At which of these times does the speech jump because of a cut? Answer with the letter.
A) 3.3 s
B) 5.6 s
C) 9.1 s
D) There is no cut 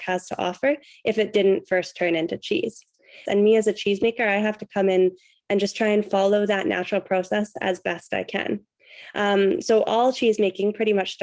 A